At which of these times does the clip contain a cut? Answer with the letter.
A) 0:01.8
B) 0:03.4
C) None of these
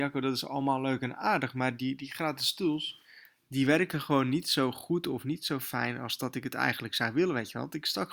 C